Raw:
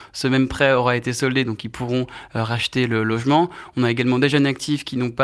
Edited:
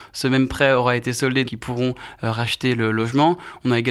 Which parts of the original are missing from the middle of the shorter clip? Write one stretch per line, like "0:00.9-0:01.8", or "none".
0:01.5-0:01.6